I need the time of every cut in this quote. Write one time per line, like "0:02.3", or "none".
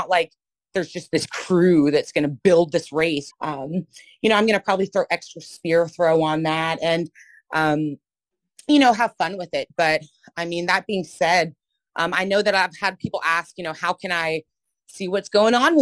0:03.3